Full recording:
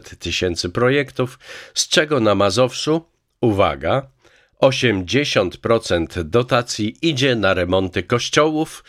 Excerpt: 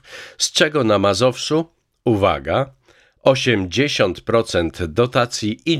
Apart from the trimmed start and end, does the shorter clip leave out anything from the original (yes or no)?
no